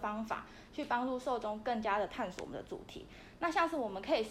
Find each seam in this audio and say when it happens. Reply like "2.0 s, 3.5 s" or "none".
none